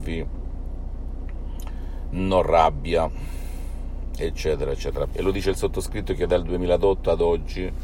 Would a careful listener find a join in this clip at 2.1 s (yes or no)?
no